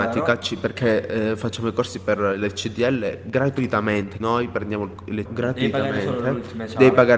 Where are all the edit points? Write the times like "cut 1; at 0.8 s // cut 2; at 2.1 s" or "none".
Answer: cut 1; at 4.2 s // cut 2; at 5.3 s